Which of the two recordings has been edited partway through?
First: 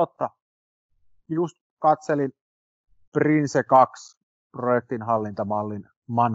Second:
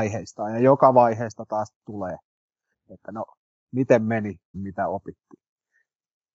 second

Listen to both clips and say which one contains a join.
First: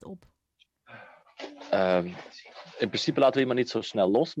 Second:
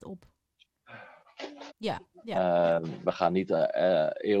second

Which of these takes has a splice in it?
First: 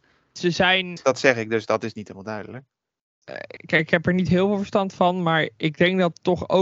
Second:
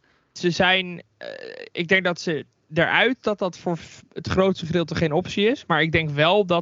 first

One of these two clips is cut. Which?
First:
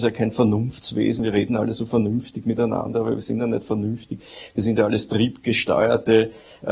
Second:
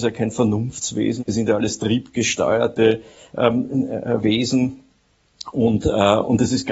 second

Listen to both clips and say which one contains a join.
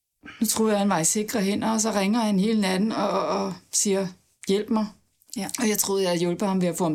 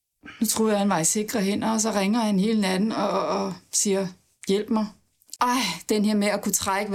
second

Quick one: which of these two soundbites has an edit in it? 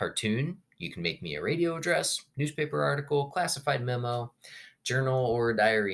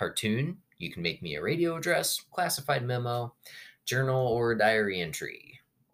second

